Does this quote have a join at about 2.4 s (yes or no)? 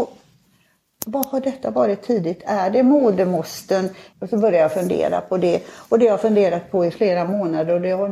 no